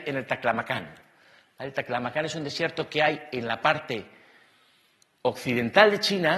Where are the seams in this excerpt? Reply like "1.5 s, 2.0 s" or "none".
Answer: none